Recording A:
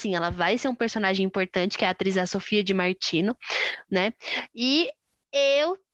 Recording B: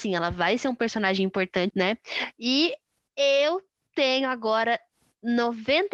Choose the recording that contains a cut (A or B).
B